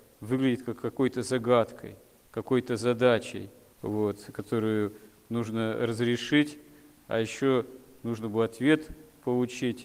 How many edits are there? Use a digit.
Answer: 0